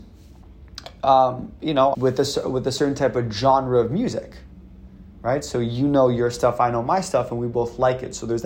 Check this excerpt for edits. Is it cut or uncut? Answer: cut